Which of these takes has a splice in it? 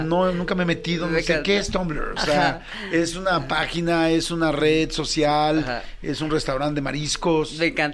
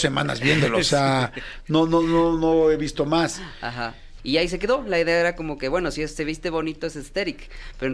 second; 1 cut; at 4.2 s

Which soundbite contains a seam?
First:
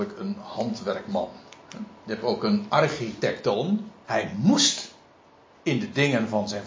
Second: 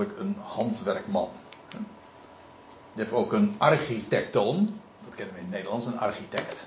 first; 2 cuts; at 2.0 s, 4.0 s

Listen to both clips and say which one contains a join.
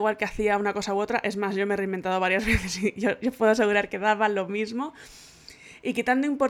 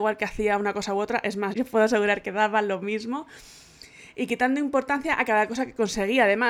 second; 1 cut; at 1.5 s

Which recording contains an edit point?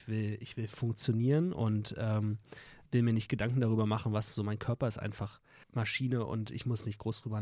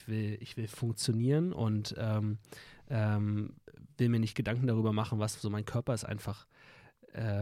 first; 2 cuts; at 2.9 s, 5.6 s

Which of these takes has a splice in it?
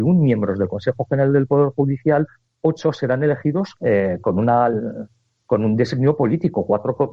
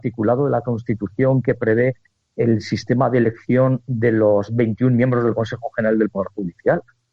first; 1 cut; at 3.8 s

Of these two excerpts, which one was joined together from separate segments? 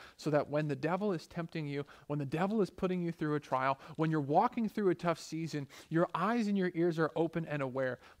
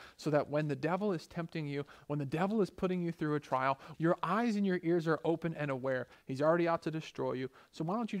second; 2 cuts; at 3.9 s, 6.1 s

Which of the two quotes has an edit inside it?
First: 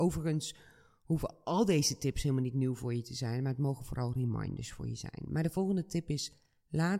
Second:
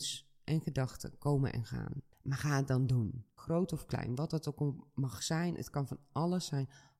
second; 2 cuts; at 2.1 s, 3.4 s

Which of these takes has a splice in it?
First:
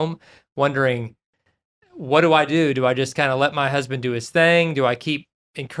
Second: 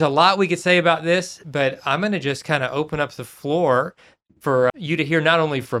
second; 1 cut; at 4.7 s

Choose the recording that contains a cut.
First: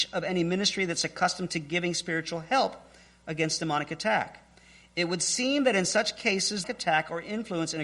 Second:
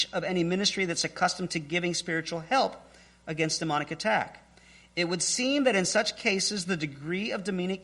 first; 1 cut; at 6.6 s

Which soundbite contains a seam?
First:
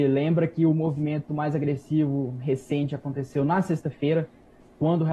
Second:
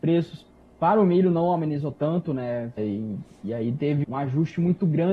second; 2 cuts; at 2.8 s, 4.0 s

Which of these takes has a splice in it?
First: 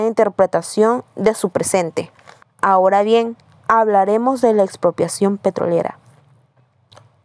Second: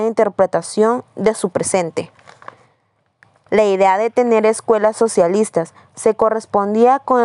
first; 1 cut; at 2.4 s

